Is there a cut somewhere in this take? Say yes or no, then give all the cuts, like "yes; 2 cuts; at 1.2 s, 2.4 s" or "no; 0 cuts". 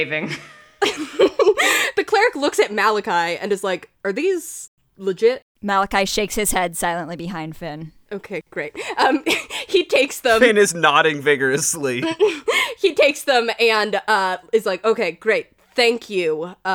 no; 0 cuts